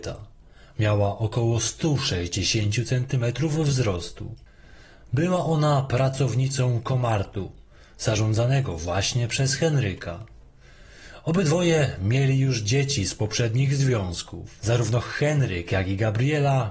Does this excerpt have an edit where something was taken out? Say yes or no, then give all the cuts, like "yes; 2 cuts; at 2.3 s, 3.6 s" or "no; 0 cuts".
no; 0 cuts